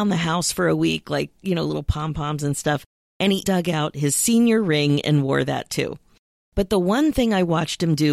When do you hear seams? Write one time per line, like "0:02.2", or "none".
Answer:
0:03.4